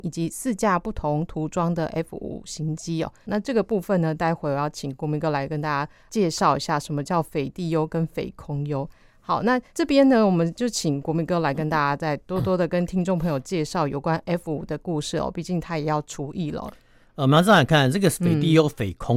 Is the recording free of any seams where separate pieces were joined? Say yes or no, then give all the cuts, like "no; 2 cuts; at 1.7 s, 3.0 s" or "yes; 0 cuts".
no; 2 cuts; at 3.2 s, 9.7 s